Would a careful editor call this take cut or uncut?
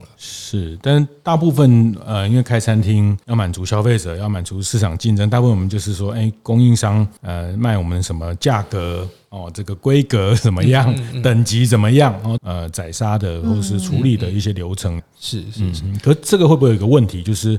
cut